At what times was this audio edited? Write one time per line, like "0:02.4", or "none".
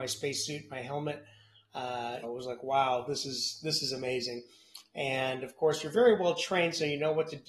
0:02.2